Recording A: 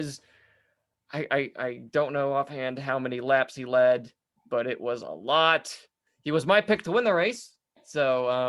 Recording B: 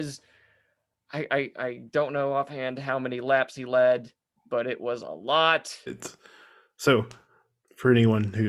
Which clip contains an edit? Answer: B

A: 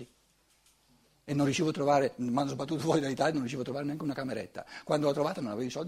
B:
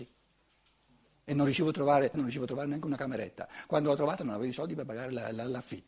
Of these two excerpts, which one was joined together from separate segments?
B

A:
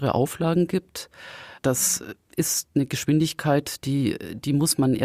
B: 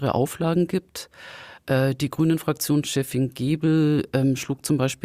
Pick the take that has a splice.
A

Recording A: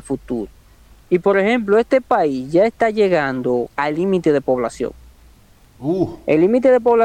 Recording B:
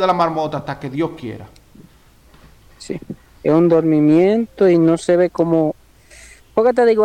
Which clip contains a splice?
A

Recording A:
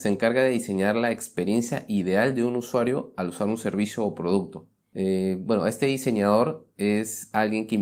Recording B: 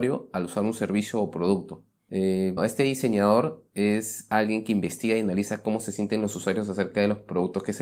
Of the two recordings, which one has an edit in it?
B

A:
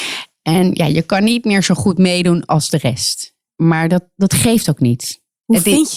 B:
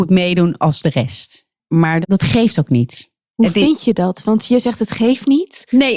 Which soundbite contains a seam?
B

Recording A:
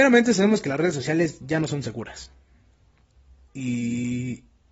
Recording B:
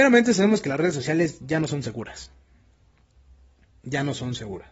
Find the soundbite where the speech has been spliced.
A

